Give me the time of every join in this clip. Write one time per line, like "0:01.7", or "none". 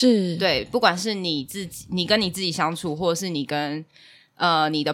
none